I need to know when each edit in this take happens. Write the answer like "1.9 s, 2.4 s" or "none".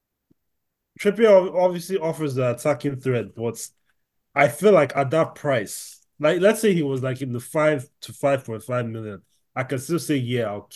none